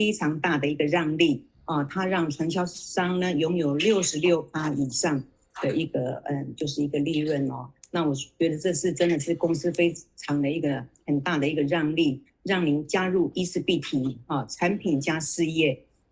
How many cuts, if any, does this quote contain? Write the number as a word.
zero